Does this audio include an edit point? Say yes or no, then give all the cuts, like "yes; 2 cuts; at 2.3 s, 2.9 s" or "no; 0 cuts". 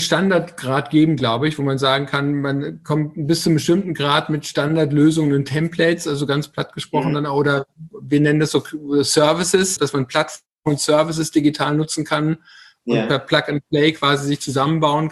yes; 1 cut; at 9.8 s